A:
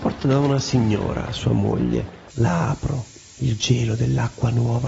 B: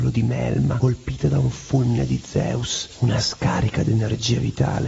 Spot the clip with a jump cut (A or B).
A